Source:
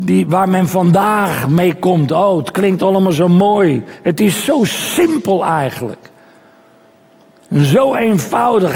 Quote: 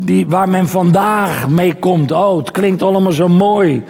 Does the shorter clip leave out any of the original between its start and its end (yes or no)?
no